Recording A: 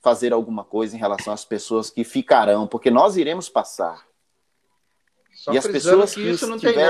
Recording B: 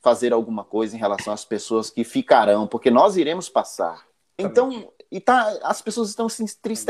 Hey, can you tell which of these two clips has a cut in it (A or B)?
B